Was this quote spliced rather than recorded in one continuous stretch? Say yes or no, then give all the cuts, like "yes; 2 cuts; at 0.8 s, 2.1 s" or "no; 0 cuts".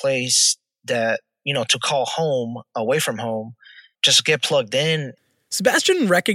yes; 1 cut; at 3.9 s